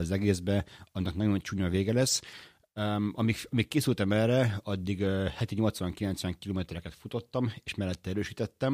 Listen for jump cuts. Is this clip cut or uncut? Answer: uncut